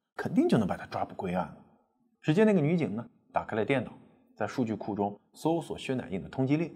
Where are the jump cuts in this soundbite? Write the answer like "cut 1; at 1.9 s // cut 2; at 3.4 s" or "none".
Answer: cut 1; at 2.2 s